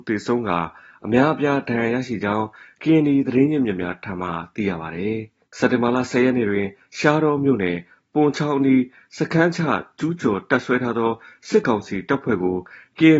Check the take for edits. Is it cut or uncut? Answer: cut